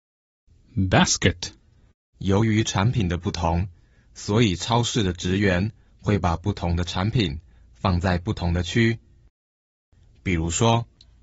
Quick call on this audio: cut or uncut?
cut